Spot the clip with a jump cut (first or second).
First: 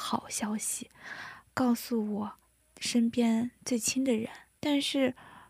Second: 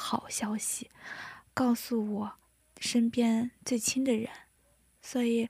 first